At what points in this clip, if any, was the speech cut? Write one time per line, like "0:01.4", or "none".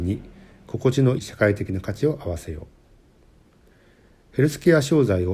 0:01.2